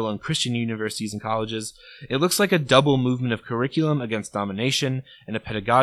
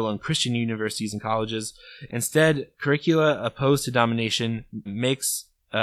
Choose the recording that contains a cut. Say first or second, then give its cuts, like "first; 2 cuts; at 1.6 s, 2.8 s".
second; 2 cuts; at 2.1 s, 4.9 s